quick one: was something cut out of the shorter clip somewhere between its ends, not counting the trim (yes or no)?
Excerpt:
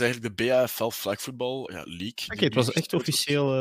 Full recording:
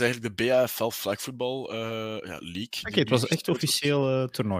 yes